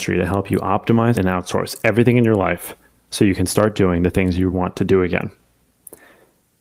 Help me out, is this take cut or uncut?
cut